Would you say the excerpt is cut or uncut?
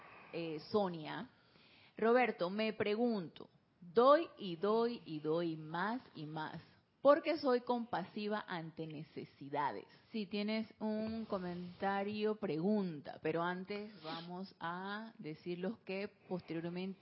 cut